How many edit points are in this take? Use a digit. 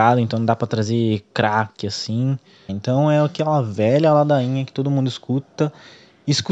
1